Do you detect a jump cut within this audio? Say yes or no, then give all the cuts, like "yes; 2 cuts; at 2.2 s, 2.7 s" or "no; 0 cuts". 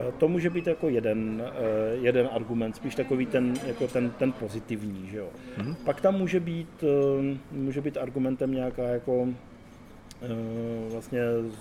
no; 0 cuts